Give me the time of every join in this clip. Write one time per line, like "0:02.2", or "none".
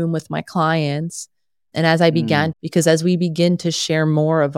0:02.5